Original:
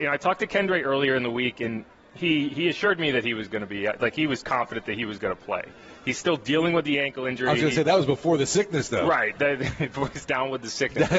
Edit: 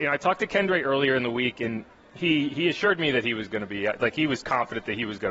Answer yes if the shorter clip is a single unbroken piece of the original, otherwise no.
yes